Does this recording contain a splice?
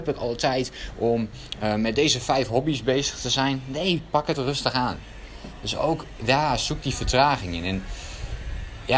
yes; 1 cut; at 4.4 s

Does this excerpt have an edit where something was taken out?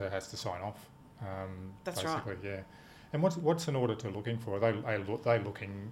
no; 0 cuts

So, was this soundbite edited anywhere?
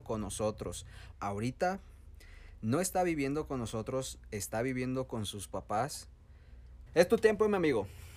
yes; 2 cuts; at 1.1 s, 6.9 s

